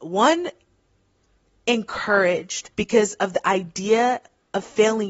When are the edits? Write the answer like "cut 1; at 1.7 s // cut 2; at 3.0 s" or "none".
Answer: cut 1; at 2.7 s